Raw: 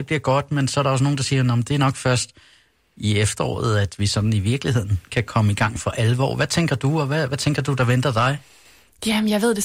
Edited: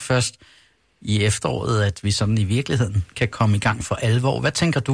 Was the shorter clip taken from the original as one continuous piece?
yes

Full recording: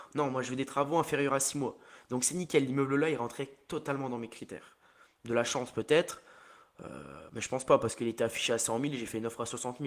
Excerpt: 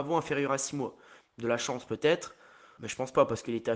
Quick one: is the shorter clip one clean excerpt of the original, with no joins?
no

